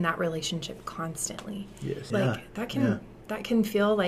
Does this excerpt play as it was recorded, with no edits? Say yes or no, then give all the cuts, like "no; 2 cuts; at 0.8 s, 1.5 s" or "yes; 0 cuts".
no; 1 cut; at 2.1 s